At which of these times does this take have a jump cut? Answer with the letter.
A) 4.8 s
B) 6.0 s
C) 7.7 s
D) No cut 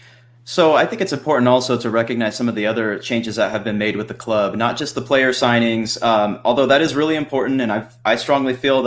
D